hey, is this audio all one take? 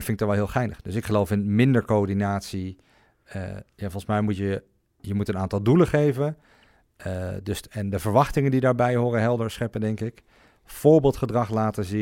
yes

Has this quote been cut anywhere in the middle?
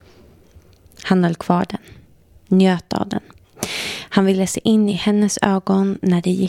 no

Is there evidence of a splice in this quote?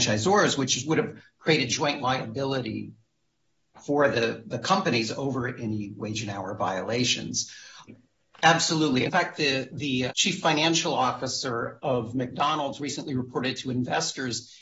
yes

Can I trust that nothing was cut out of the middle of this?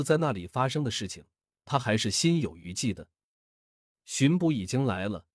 no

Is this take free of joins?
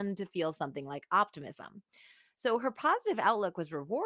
yes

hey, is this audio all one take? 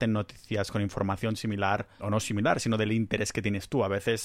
no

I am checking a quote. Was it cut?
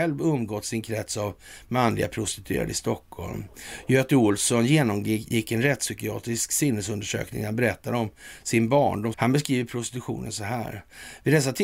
yes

